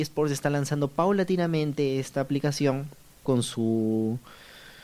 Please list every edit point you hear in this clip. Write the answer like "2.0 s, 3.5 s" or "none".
3.3 s